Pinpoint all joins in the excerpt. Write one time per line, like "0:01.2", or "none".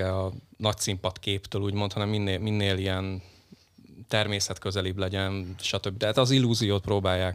none